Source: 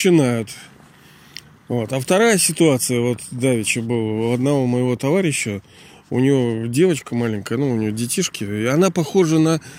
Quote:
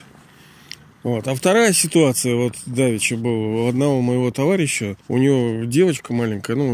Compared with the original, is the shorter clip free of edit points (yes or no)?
no